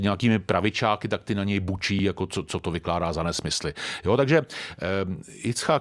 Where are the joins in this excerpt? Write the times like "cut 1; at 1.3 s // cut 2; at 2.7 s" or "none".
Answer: none